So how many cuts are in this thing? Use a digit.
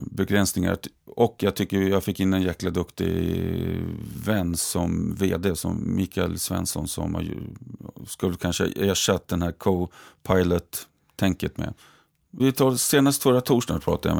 1